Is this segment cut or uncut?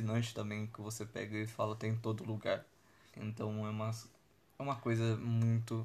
cut